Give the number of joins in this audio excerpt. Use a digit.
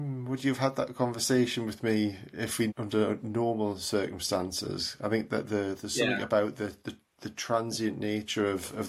1